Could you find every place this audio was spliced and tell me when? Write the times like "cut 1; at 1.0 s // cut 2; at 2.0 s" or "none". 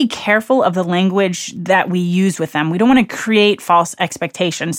none